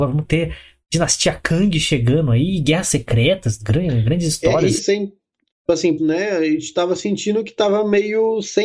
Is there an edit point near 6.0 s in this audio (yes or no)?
yes